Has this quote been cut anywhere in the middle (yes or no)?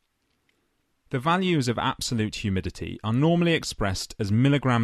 yes